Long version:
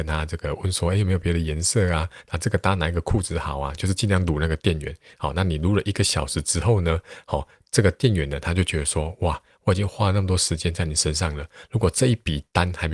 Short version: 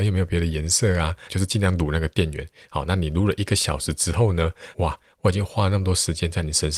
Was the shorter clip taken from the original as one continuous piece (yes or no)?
no